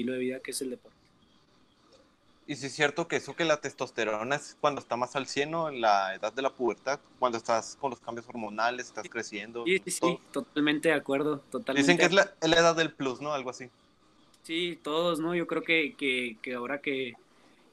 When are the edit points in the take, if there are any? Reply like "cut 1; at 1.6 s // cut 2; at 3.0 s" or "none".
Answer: none

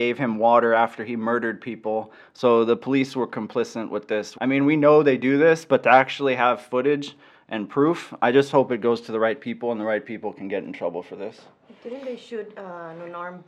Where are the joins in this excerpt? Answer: cut 1; at 4.3 s // cut 2; at 11.8 s

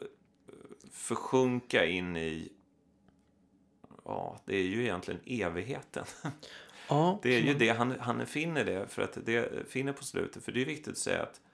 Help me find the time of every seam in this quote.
none

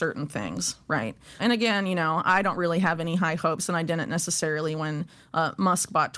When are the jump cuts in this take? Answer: cut 1; at 1.4 s

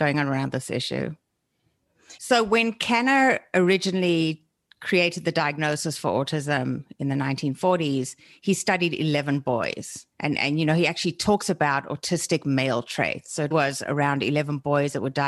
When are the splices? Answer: cut 1; at 2.2 s // cut 2; at 10.1 s // cut 3; at 13.5 s

